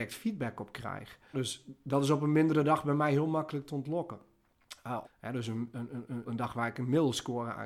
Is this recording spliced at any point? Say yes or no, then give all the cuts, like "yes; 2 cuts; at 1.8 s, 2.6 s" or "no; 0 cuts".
yes; 3 cuts; at 1.3 s, 5.0 s, 6.2 s